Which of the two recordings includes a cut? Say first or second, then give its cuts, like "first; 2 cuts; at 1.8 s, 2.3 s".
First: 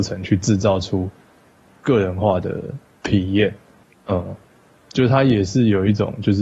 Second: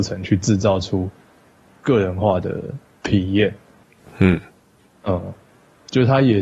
first; 1 cut; at 3.9 s